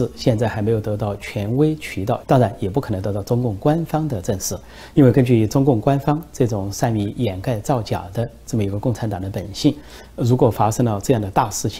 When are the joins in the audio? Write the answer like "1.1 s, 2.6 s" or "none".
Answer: 2.2 s